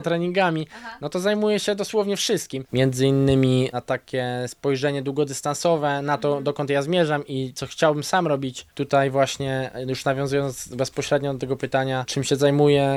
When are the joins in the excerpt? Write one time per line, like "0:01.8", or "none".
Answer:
0:02.6